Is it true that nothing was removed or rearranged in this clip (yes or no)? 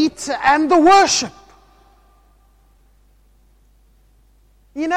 yes